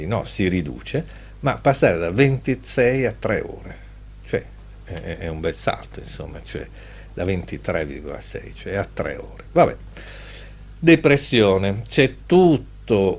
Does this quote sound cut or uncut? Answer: uncut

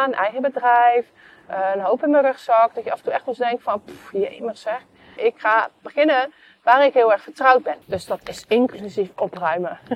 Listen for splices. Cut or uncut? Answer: cut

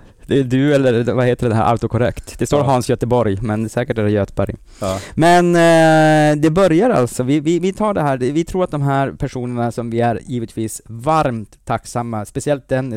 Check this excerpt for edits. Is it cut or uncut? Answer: uncut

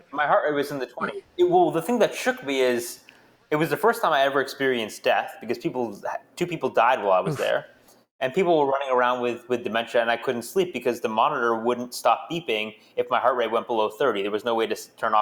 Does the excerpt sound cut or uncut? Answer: uncut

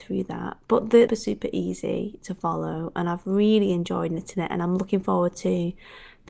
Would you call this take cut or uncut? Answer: cut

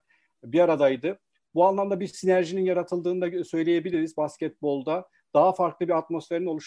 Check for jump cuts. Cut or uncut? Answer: uncut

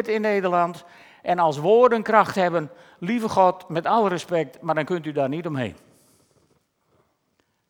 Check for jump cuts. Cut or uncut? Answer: uncut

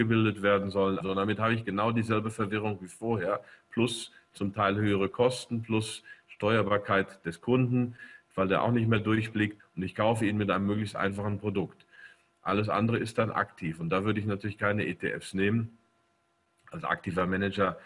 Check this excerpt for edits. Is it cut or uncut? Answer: cut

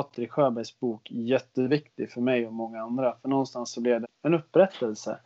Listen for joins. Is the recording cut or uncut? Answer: cut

